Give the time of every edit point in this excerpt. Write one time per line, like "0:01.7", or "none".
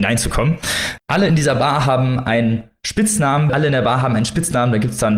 0:01.0
0:03.5